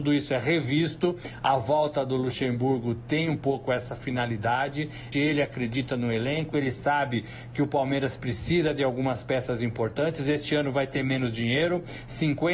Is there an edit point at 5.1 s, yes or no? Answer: yes